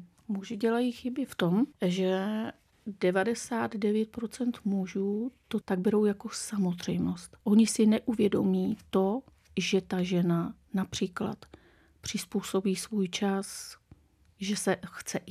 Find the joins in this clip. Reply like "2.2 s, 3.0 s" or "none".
5.6 s, 7.4 s